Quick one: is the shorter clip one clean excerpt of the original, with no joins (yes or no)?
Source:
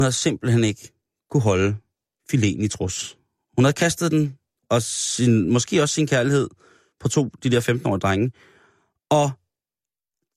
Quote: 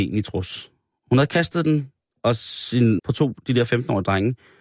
no